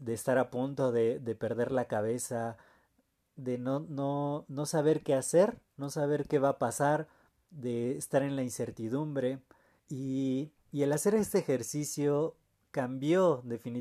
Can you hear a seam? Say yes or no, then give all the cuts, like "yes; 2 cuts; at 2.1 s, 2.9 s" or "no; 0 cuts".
yes; 1 cut; at 9.8 s